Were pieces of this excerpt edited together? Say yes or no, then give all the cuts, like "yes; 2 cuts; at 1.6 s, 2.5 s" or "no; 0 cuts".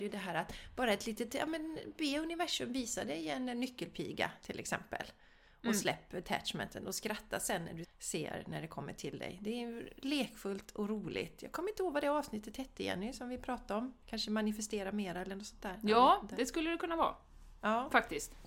yes; 2 cuts; at 7.8 s, 14.0 s